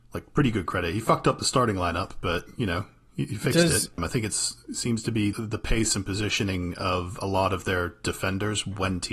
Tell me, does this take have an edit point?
yes; 2 cuts; at 4.0 s, 5.3 s

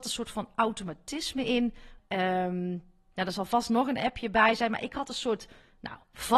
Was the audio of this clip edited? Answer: yes; 1 cut; at 2.0 s

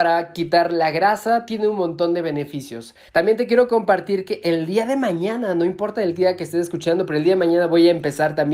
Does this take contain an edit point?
yes; 1 cut; at 3.1 s

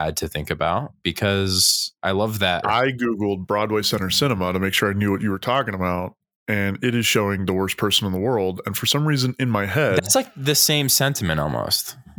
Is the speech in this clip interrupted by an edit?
yes; 1 cut; at 2.6 s

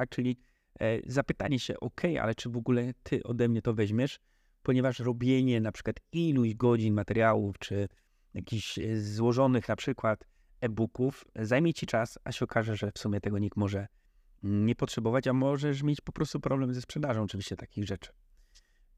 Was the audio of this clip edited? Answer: no; 0 cuts

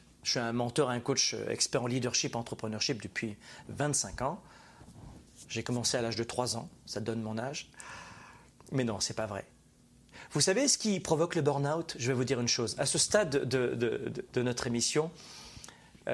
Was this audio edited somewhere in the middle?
no; 0 cuts

